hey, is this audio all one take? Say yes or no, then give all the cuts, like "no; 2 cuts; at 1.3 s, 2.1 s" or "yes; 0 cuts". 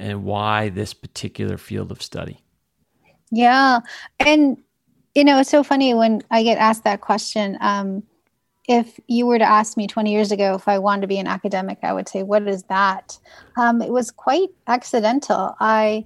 yes; 0 cuts